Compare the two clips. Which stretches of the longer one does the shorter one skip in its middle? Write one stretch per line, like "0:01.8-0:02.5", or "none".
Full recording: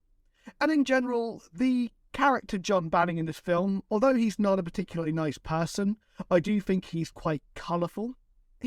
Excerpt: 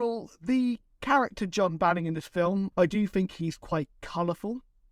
0:03.8-0:06.3